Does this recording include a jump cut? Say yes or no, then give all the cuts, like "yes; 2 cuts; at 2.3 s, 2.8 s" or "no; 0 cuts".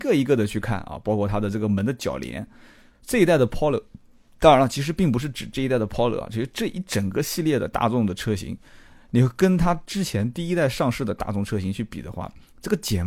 no; 0 cuts